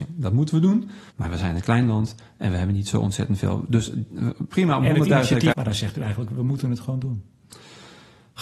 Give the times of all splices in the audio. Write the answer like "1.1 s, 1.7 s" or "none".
1.1 s, 5.5 s